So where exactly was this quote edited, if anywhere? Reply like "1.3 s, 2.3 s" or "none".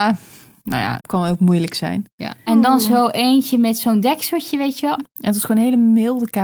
1.0 s, 2.5 s, 5.0 s